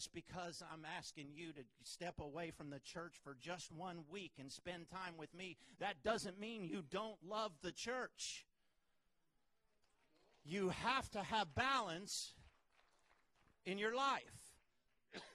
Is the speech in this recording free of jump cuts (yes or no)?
yes